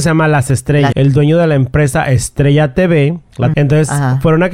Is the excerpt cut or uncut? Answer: cut